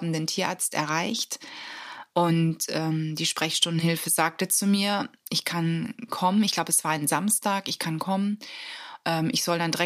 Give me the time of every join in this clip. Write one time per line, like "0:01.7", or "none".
none